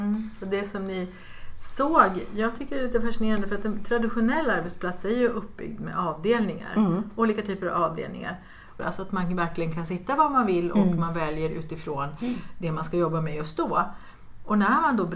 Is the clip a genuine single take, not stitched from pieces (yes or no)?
no